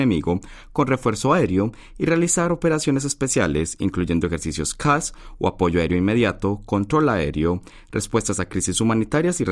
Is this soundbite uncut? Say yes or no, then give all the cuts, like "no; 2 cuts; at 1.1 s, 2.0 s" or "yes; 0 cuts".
yes; 0 cuts